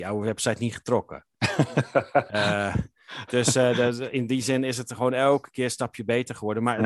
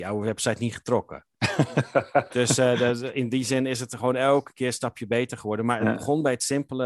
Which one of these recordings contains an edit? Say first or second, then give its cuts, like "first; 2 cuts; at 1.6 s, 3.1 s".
second; 1 cut; at 2.3 s